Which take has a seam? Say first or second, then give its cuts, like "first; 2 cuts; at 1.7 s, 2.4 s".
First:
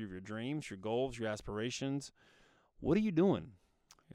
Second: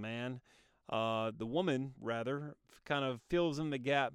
second; 1 cut; at 2.0 s